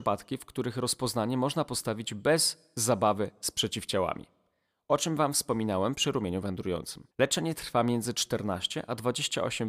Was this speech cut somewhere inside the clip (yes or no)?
yes